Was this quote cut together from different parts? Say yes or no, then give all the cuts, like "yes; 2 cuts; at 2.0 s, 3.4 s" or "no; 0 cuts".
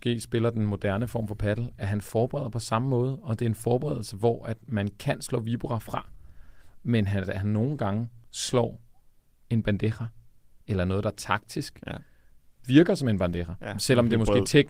no; 0 cuts